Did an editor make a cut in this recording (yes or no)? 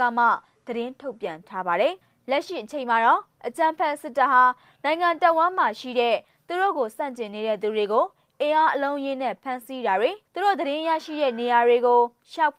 yes